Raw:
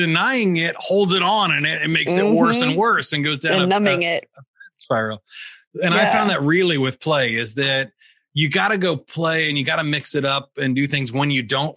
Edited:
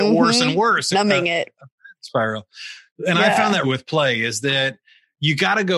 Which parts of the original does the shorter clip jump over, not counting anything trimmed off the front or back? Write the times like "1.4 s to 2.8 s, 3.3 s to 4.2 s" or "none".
3.1 s to 3.7 s, 6.4 s to 6.8 s

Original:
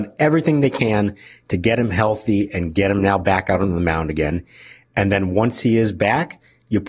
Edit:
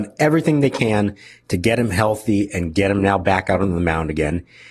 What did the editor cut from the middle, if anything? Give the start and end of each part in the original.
none

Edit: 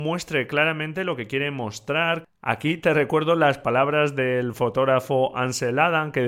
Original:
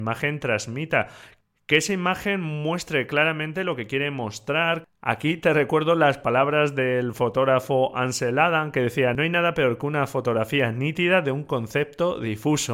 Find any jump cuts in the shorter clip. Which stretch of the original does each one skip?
none

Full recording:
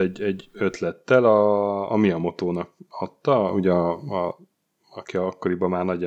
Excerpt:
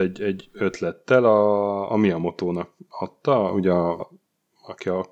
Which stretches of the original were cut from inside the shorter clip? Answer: 4.0 s to 4.3 s

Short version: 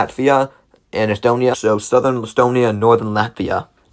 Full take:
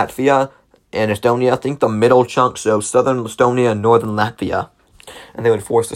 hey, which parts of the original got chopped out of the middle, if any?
1.5 s to 2.5 s

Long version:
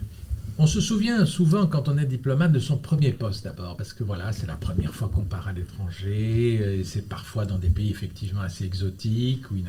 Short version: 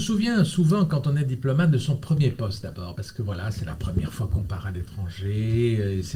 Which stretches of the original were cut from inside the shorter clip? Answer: none

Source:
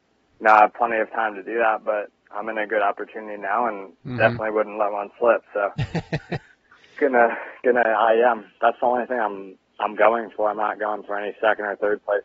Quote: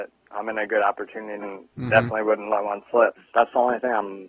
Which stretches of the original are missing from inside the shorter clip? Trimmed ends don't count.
3.4 s to 3.7 s, 5.4 s to 8.4 s

